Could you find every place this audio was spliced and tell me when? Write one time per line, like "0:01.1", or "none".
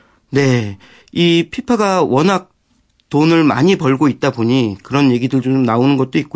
none